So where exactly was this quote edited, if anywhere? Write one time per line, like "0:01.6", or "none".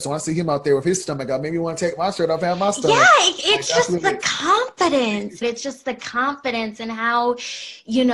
0:05.4